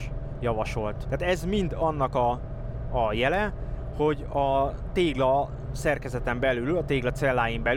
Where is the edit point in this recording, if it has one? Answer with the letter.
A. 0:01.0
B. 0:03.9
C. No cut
A